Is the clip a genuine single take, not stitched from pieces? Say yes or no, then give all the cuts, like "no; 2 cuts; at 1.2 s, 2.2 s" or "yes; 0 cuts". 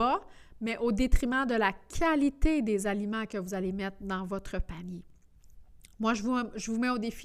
yes; 0 cuts